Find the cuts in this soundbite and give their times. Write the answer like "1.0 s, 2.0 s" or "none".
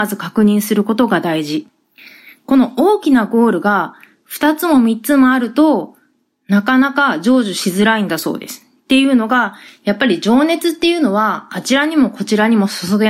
none